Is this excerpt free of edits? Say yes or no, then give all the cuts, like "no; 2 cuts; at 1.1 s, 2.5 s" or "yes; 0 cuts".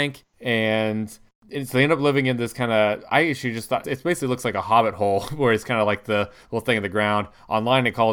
no; 1 cut; at 3.8 s